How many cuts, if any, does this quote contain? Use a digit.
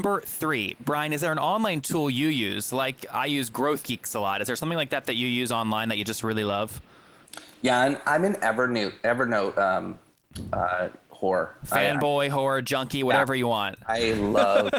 0